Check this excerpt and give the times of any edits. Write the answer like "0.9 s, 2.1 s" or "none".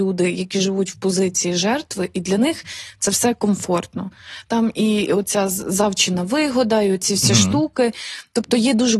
none